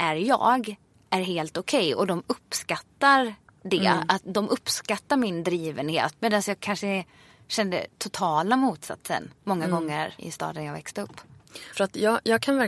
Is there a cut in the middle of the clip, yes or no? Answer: yes